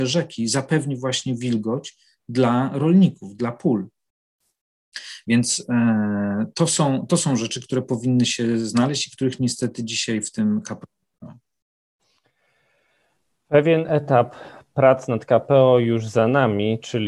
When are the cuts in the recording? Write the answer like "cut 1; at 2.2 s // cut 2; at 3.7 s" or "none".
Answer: none

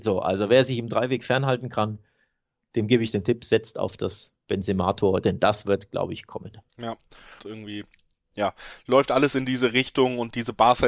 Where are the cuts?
cut 1; at 7.4 s

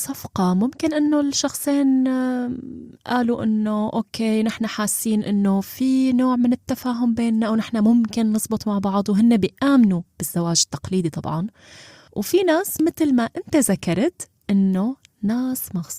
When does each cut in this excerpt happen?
none

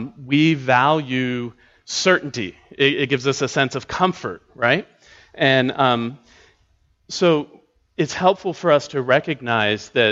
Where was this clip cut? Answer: none

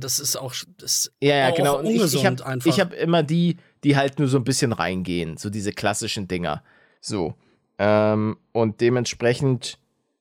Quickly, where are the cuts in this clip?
none

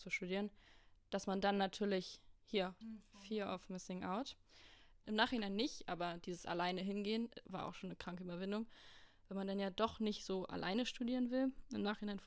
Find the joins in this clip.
cut 1; at 2.8 s // cut 2; at 5.0 s

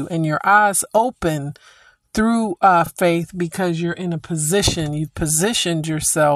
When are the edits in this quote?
none

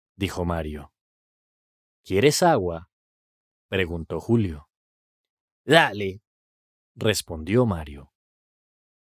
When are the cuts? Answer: none

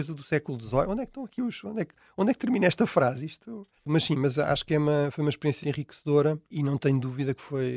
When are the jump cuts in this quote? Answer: cut 1; at 3.8 s // cut 2; at 5.6 s

